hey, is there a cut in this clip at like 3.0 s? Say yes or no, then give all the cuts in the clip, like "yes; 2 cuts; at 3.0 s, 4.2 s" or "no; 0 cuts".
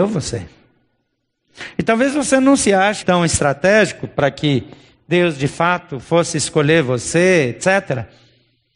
yes; 1 cut; at 3.0 s